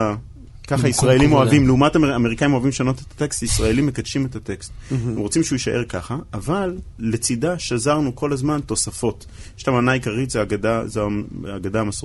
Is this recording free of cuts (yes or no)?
yes